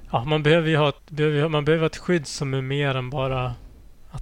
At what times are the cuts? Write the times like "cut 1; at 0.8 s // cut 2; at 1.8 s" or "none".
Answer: cut 1; at 1.0 s